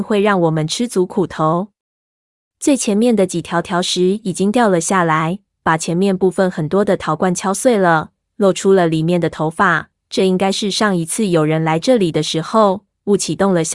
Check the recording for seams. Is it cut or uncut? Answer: uncut